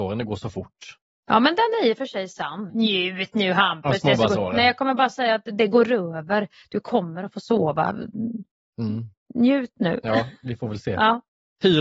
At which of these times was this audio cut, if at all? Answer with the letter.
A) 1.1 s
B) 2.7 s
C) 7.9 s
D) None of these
B